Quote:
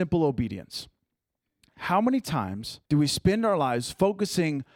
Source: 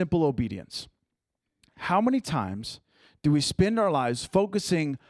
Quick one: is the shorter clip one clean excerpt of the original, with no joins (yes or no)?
no